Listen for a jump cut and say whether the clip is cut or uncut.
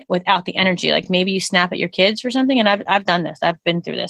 uncut